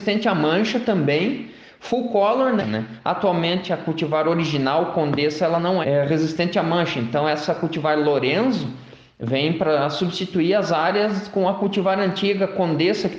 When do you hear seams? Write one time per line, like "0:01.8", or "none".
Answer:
0:02.6
0:05.8